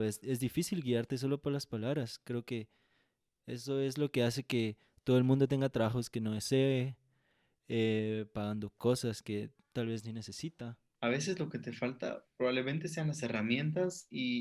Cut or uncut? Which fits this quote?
cut